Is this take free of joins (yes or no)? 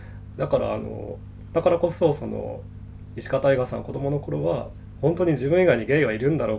yes